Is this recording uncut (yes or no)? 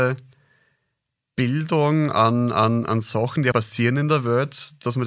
no